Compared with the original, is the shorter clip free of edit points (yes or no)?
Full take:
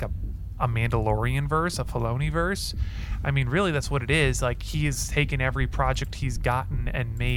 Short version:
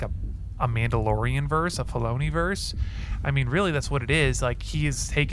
yes